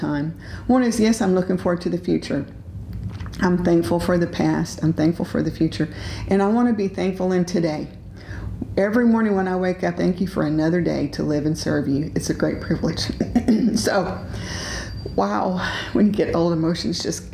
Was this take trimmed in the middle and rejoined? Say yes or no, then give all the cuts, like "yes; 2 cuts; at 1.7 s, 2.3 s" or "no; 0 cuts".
yes; 1 cut; at 10.0 s